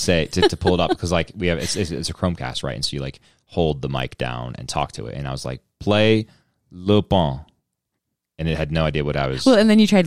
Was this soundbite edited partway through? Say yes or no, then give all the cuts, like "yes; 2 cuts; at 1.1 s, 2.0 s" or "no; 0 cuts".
no; 0 cuts